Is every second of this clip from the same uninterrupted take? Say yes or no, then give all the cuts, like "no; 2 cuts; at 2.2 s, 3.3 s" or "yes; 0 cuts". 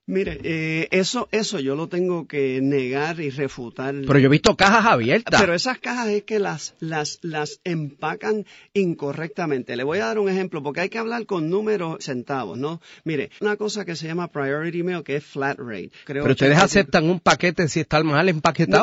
no; 3 cuts; at 12.0 s, 13.4 s, 16.0 s